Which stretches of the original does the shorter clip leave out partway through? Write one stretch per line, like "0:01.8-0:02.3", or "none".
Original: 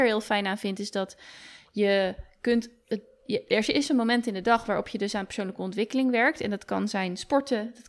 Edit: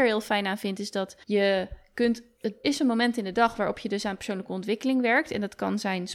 0:01.2-0:01.7
0:03.1-0:03.7

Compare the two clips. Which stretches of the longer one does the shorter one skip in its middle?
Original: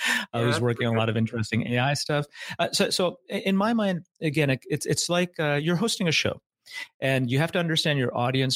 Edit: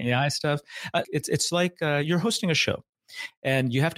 0:02.7-0:04.6

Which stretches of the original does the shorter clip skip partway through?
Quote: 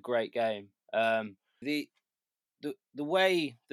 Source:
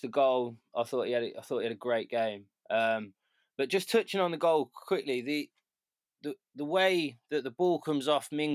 0:03.4-0:05.2

